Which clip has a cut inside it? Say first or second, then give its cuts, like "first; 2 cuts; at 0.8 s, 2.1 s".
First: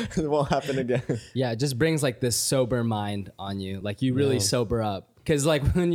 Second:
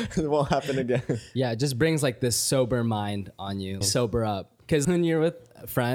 second; 2 cuts; at 3.8 s, 4.8 s